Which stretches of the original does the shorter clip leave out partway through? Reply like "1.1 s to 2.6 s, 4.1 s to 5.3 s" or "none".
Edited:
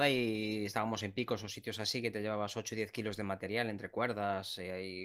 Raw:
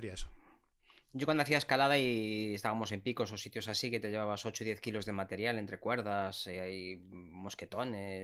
none